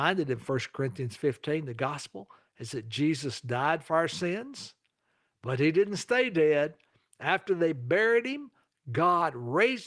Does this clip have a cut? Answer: no; 0 cuts

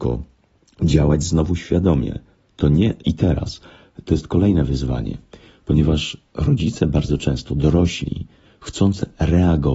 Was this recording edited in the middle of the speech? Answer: yes; 1 cut; at 3.0 s

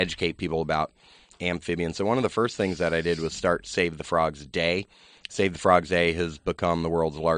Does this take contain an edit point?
no; 0 cuts

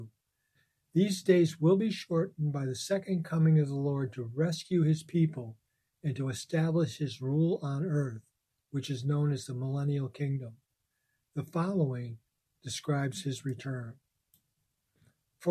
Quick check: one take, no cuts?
yes; 0 cuts

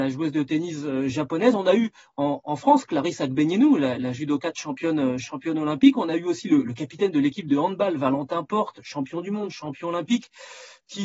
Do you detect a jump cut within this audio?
no; 0 cuts

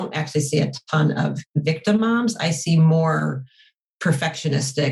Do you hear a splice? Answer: no; 0 cuts

